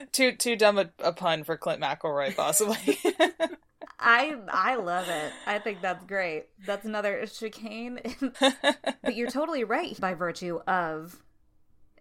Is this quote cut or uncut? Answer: cut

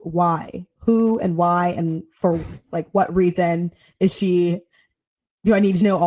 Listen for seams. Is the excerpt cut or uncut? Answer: uncut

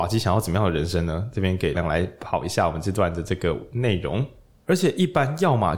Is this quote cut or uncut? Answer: cut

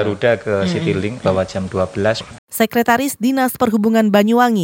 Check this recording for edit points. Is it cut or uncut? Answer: cut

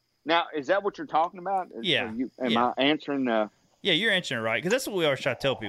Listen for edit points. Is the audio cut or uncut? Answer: uncut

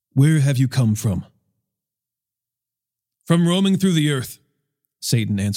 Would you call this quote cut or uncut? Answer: uncut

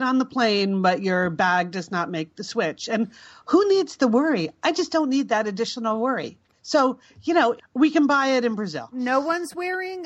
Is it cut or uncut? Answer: cut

